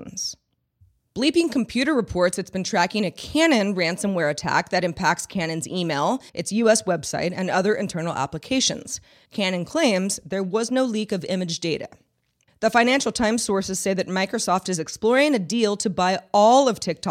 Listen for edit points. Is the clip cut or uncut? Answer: cut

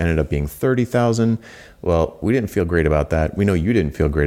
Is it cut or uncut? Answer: uncut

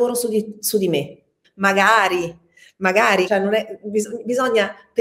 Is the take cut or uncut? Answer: cut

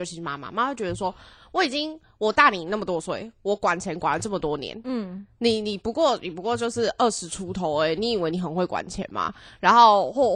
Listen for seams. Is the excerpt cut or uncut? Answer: uncut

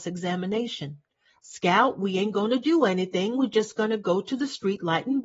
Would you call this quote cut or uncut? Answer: uncut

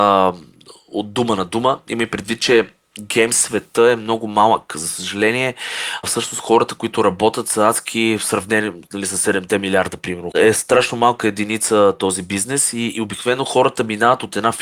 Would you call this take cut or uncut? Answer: cut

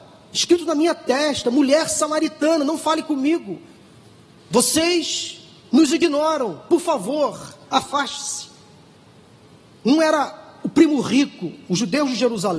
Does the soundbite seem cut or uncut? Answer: cut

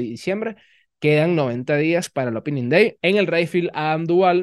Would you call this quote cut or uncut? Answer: cut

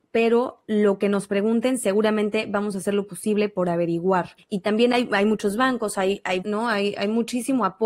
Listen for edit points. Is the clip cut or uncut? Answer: cut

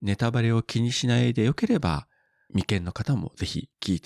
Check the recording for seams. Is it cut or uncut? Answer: uncut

